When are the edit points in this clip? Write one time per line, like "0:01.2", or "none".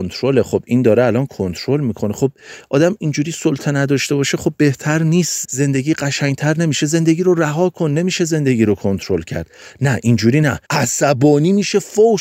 0:05.4
0:10.6